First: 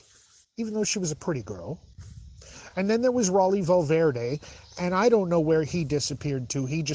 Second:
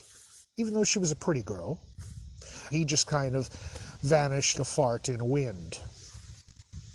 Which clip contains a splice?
second; 2 cuts; at 2.7 s, 4.5 s

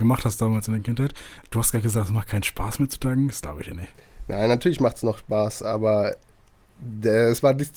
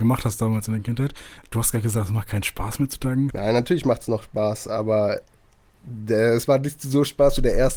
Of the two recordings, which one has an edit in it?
second; 1 cut; at 3.3 s

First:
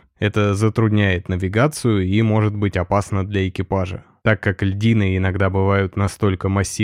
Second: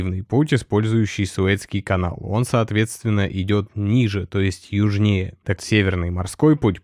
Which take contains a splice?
second; 1 cut; at 5.6 s

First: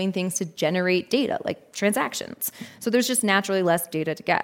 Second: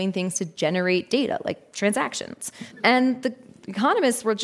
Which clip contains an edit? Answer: second; 1 cut; at 2.7 s

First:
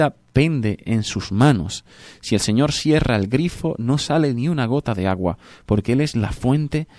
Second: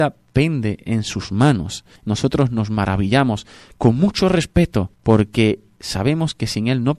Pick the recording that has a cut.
second; 2 cuts; at 2.0 s, 4.9 s

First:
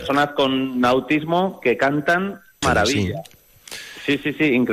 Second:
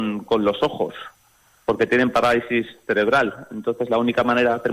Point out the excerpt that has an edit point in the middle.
first; 1 cut; at 2.6 s

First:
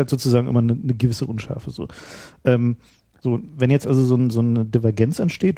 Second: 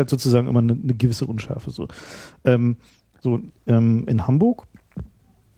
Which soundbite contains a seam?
second; 1 cut; at 3.5 s

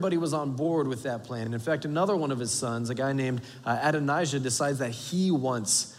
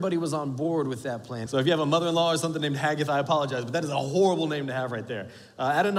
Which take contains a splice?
second; 1 cut; at 1.5 s

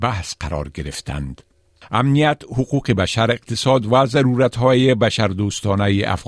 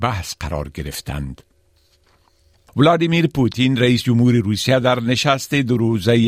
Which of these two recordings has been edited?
first; 1 cut; at 1.8 s

